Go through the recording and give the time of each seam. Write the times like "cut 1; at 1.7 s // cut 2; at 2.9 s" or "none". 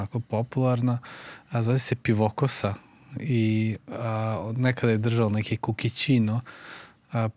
none

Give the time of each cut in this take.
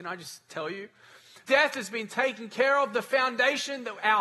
cut 1; at 1.4 s

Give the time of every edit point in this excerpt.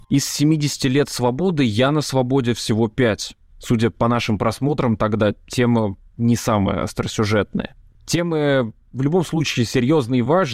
cut 1; at 3.5 s

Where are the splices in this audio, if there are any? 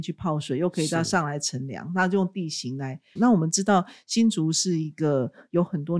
cut 1; at 3.2 s

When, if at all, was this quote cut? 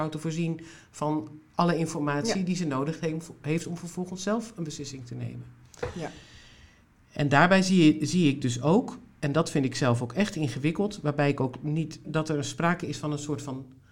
cut 1; at 12.0 s

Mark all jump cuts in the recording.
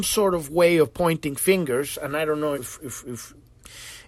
cut 1; at 2.5 s

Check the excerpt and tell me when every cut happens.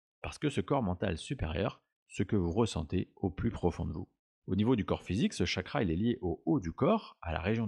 cut 1; at 1.9 s // cut 2; at 4.4 s

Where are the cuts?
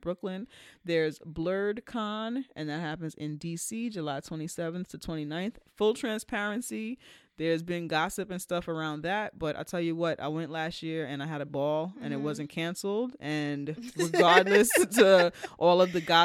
none

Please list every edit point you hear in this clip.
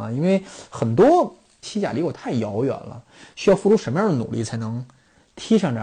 cut 1; at 1.6 s

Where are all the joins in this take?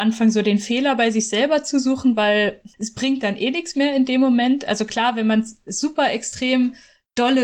cut 1; at 2.7 s

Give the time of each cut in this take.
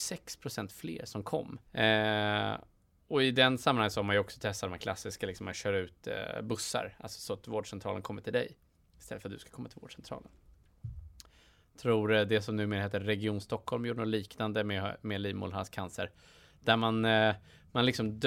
cut 1; at 1.7 s

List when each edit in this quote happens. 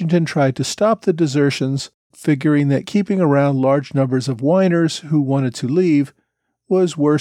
cut 1; at 2.1 s

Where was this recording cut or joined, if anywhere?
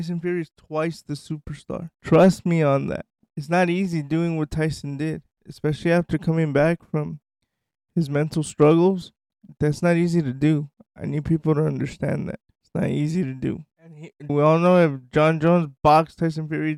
cut 1; at 14.3 s

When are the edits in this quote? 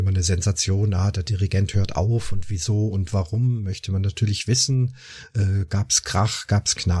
none

